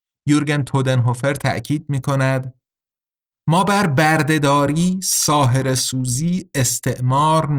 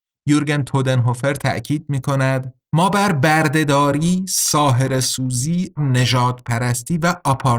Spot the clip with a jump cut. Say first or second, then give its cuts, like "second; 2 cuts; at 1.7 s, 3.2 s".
second; 2 cuts; at 2.6 s, 5.8 s